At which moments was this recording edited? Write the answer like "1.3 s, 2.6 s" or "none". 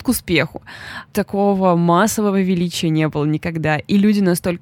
1.1 s